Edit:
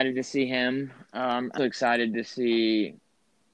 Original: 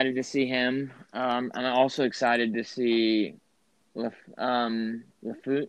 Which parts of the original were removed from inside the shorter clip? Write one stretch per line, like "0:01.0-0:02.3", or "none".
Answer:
0:01.6-0:02.0